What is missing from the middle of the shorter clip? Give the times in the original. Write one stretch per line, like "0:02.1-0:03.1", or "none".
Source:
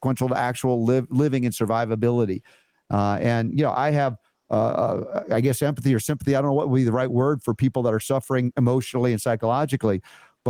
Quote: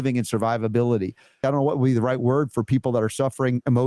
0:02.7-0:06.3